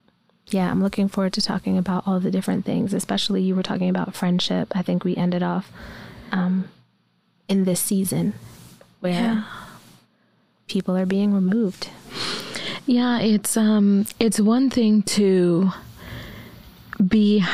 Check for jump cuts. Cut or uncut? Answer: uncut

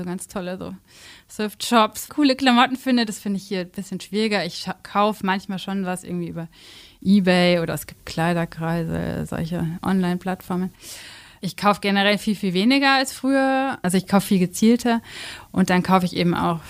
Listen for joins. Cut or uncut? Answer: cut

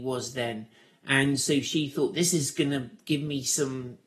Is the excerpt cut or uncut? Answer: uncut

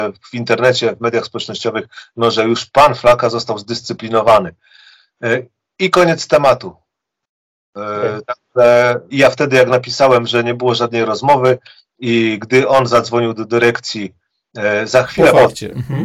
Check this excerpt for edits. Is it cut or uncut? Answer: cut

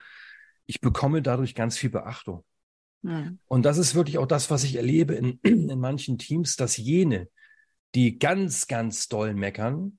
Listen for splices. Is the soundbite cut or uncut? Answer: uncut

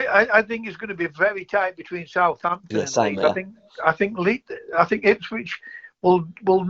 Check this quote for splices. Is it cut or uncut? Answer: uncut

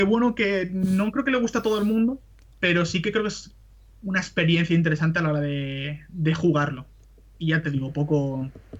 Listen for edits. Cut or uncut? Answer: uncut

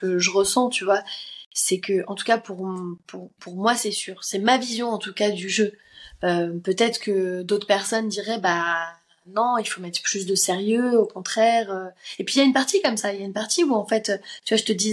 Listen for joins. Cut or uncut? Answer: uncut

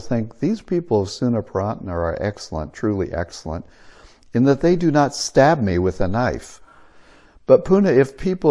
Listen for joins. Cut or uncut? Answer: cut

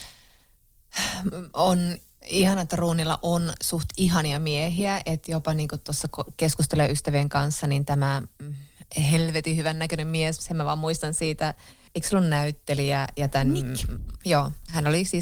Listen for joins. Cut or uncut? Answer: cut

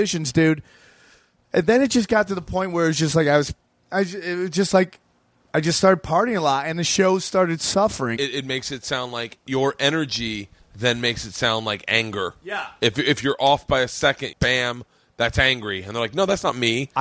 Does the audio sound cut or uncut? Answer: cut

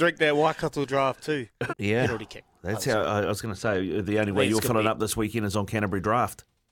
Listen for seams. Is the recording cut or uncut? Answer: cut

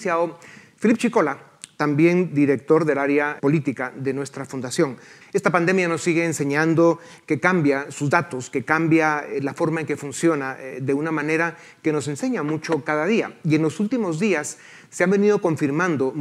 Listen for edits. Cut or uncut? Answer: cut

